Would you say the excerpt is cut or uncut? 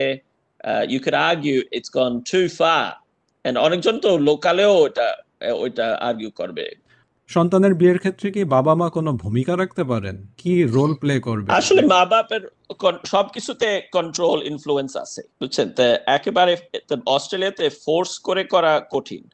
cut